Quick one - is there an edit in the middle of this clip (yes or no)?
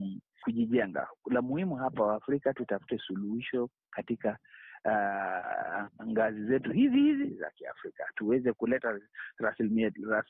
no